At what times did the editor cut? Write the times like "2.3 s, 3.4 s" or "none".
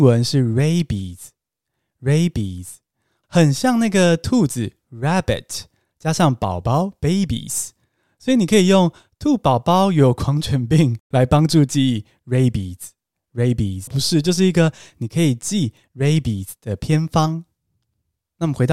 13.9 s